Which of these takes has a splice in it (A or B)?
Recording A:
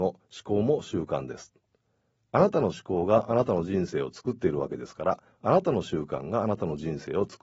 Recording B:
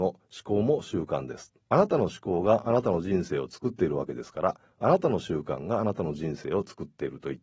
B